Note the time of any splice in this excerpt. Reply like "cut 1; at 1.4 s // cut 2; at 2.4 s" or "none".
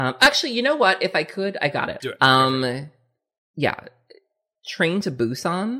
cut 1; at 2.0 s

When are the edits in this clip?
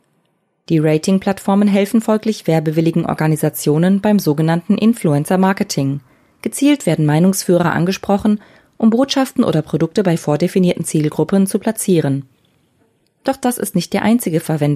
none

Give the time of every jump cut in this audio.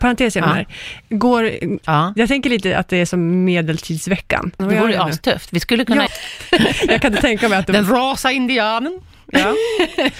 cut 1; at 1.8 s // cut 2; at 4.6 s // cut 3; at 6.1 s

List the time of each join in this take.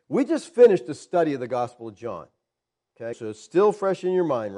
cut 1; at 3.1 s

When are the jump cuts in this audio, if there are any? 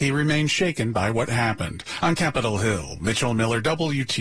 none

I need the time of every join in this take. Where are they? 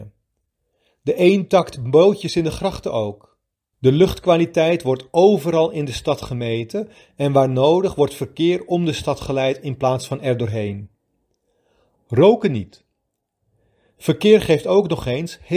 cut 1; at 3.7 s // cut 2; at 12.0 s

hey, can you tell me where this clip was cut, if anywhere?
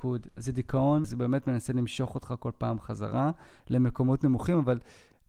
cut 1; at 1.0 s

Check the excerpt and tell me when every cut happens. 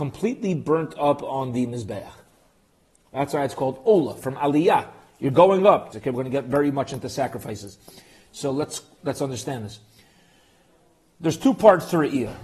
cut 1; at 5.9 s

